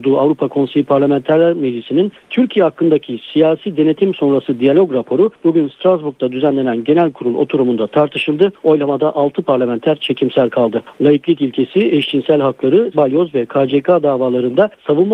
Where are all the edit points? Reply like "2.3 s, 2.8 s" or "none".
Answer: 8.6 s, 10.9 s, 12.9 s